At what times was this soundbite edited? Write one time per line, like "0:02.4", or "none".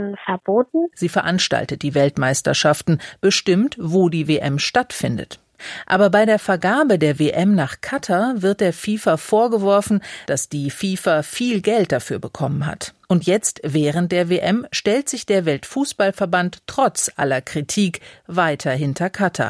0:00.9
0:10.3